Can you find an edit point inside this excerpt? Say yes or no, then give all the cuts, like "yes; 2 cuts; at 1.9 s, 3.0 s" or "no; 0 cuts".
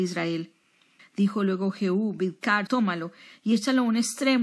yes; 2 cuts; at 1.0 s, 2.7 s